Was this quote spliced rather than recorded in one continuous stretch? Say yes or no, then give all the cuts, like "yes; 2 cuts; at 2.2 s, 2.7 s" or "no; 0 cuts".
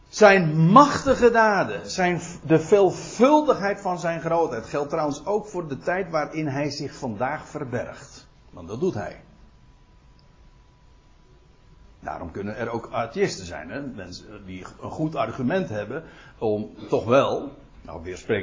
no; 0 cuts